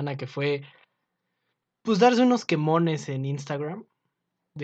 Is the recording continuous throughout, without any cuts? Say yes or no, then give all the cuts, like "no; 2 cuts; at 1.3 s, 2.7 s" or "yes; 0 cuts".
yes; 0 cuts